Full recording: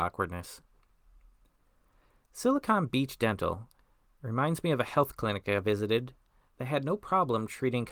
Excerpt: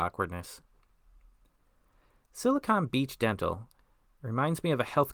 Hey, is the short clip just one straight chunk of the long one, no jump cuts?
yes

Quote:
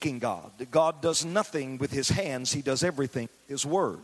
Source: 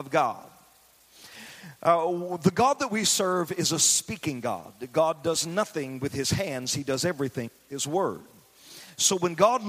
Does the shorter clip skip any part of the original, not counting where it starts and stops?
no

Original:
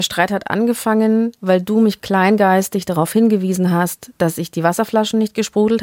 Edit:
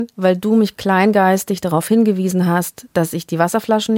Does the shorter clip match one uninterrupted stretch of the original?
yes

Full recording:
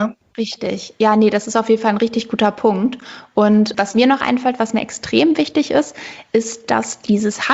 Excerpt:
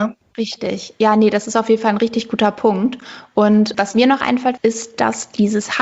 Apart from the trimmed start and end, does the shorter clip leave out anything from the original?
yes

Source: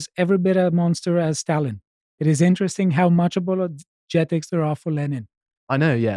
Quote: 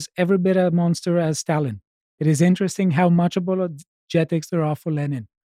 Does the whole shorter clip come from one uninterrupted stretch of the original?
yes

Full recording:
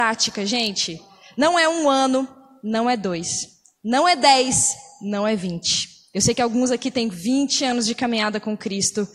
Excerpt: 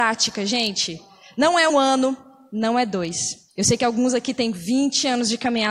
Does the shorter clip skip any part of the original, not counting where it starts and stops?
yes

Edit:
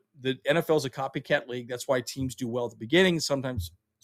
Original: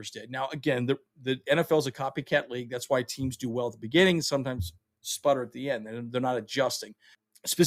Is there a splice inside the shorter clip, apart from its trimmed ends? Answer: no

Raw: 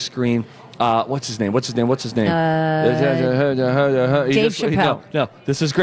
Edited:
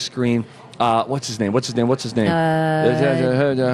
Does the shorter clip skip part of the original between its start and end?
no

